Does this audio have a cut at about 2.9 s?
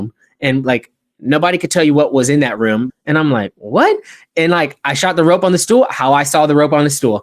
yes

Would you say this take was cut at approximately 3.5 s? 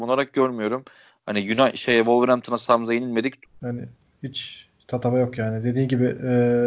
yes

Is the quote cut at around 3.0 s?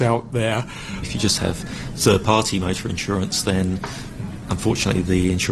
no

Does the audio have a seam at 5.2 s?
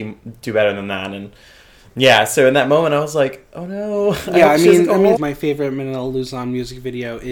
yes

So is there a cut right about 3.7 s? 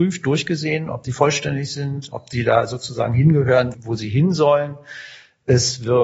yes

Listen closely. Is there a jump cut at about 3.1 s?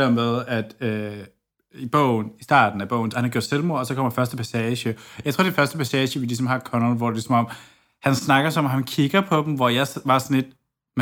yes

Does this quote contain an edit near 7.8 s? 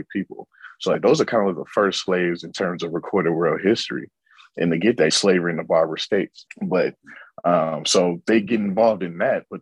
no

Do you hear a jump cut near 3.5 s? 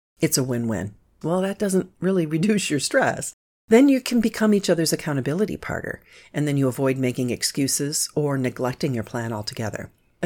yes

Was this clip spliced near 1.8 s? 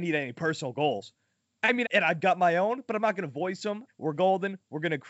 yes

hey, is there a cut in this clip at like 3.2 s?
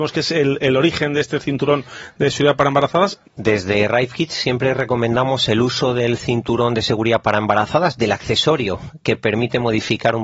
yes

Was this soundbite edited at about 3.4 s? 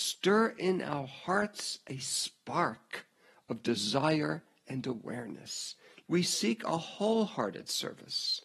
no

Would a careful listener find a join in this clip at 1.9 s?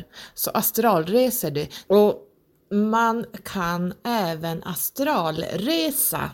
yes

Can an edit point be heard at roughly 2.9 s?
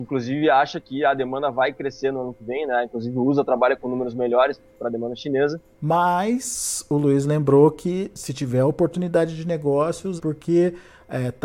no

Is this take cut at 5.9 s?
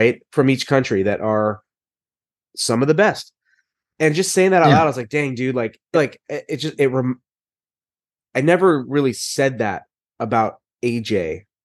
yes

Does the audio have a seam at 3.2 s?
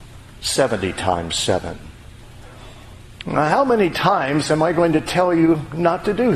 yes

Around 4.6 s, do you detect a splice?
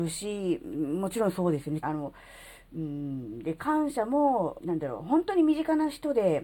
yes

